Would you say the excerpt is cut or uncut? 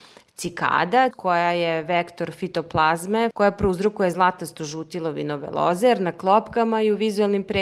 cut